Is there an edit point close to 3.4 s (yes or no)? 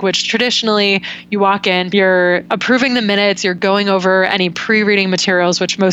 no